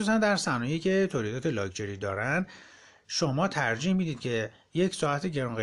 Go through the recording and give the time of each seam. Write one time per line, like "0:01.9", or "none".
none